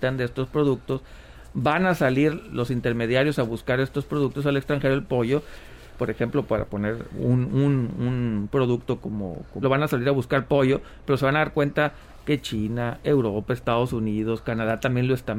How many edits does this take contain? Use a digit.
1